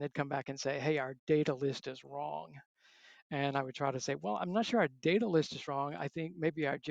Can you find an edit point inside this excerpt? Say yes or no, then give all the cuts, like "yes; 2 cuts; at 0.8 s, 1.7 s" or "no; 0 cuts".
no; 0 cuts